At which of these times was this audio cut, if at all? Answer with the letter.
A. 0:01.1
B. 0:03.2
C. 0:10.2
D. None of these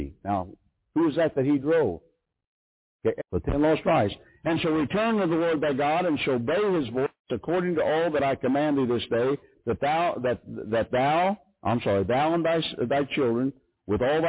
B